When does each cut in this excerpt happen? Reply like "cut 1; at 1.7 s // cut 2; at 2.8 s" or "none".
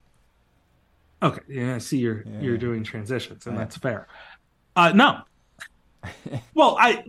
none